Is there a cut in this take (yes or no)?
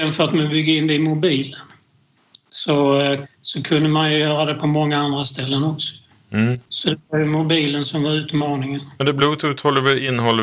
yes